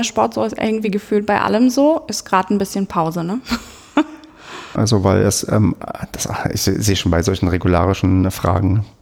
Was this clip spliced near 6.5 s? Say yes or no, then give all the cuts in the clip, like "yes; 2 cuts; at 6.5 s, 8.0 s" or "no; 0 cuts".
no; 1 cut; at 4.8 s